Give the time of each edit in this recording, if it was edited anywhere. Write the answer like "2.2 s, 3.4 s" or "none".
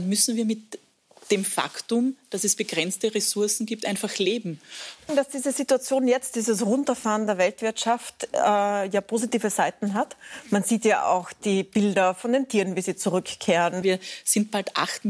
5.1 s, 13.8 s